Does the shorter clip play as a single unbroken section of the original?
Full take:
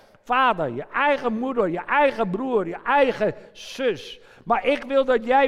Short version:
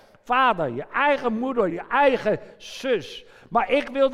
no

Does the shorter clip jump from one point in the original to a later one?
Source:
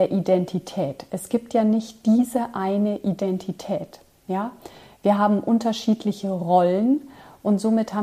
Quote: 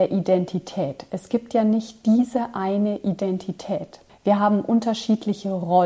yes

